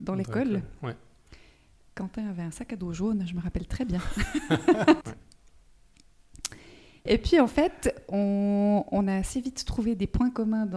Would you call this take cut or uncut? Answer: cut